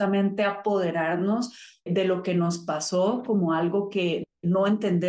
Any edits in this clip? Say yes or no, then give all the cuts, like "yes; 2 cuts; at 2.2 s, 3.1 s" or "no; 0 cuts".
yes; 1 cut; at 1.9 s